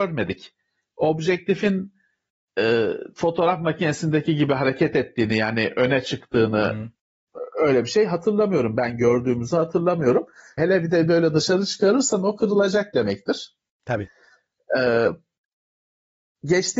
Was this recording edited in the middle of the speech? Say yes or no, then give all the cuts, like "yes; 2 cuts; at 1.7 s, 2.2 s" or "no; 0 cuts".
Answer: yes; 1 cut; at 10.6 s